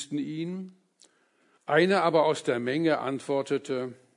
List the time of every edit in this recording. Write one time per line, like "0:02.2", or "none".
0:01.6